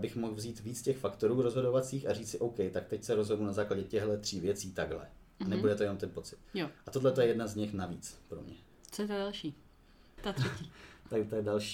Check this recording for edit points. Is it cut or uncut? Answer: cut